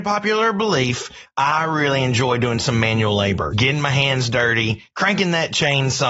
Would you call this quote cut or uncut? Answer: cut